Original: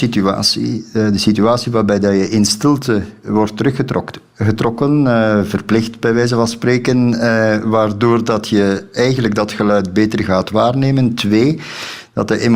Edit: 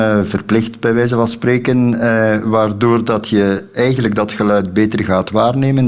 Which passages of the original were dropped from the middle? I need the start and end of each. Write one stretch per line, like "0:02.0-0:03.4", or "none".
none